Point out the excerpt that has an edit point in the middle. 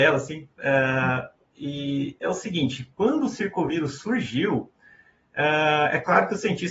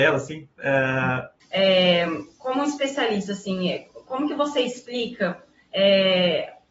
second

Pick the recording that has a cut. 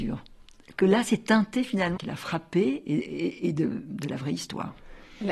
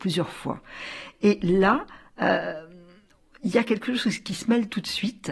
first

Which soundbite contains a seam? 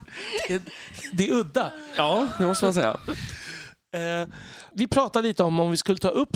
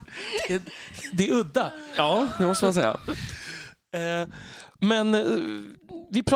first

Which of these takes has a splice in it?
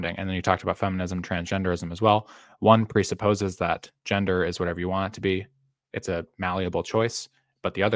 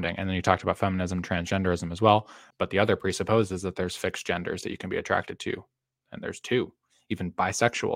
second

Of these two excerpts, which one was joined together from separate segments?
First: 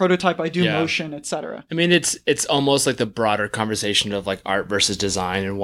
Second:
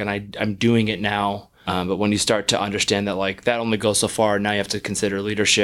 second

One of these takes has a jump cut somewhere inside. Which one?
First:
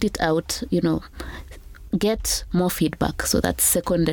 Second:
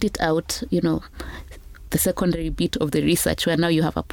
second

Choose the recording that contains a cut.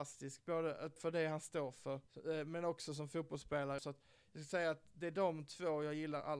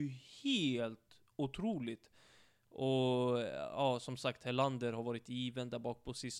first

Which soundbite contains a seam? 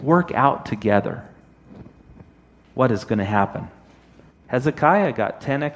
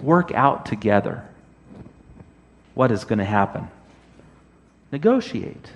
first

